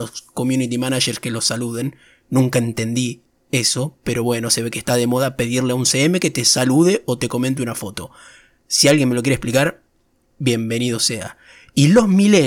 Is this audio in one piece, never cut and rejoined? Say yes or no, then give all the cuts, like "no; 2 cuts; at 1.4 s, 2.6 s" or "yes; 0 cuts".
yes; 0 cuts